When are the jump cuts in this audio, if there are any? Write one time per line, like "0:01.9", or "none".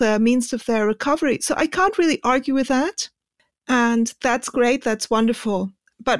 none